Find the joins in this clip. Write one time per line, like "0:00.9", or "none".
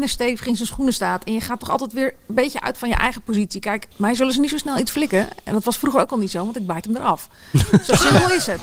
0:03.9